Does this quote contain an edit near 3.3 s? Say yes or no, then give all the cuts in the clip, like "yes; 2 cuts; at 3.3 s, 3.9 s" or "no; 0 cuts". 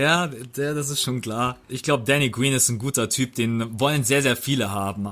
no; 1 cut; at 1.7 s